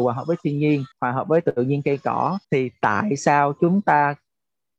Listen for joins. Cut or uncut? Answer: cut